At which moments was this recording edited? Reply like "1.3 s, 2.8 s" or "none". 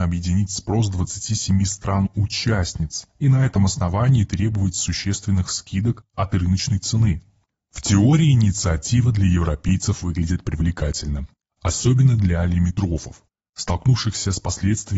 none